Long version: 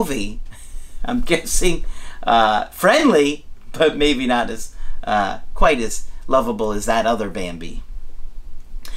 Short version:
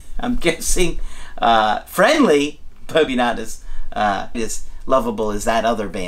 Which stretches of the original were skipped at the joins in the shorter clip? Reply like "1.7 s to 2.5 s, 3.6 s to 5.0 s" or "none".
3.9 s to 4.2 s, 5.5 s to 5.8 s